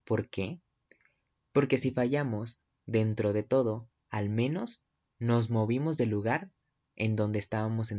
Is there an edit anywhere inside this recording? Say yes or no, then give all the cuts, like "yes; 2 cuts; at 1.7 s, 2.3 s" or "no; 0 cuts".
no; 0 cuts